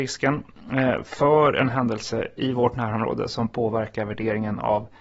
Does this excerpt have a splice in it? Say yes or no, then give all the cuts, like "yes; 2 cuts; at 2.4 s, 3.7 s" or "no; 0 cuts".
no; 0 cuts